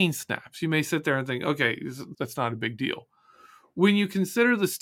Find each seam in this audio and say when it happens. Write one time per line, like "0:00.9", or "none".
0:02.1